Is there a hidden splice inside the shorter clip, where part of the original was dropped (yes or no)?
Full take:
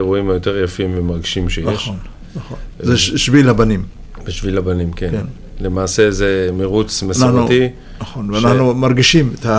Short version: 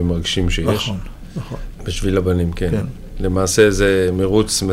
yes